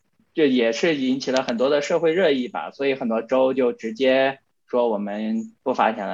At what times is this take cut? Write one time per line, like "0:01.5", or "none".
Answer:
none